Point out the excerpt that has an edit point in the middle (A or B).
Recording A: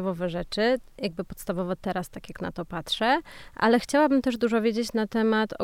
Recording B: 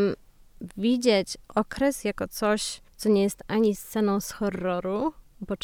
B